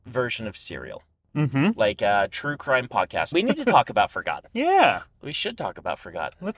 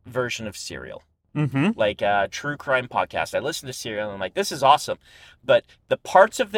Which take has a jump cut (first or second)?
first